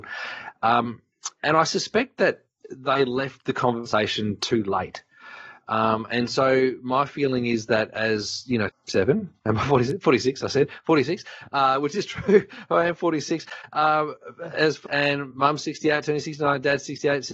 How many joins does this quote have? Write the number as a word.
two